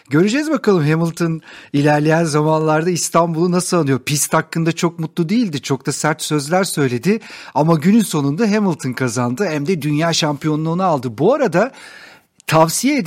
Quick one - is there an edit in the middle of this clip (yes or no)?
no